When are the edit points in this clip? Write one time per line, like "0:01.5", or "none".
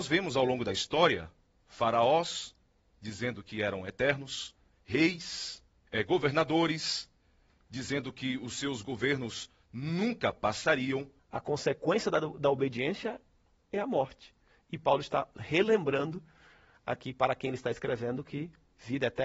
0:05.9
0:11.2

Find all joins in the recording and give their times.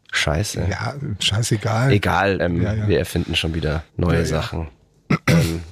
0:02.4
0:03.9

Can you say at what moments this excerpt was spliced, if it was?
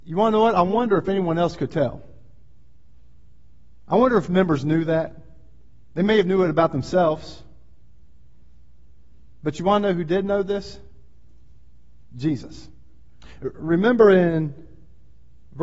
none

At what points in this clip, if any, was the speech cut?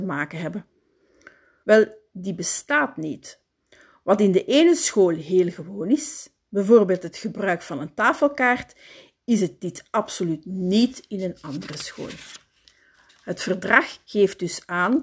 0:01.6
0:13.1

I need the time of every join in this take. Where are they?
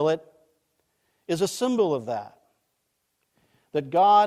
none

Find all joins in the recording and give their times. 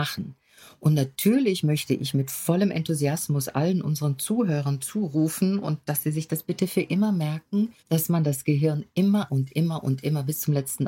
0:07.8

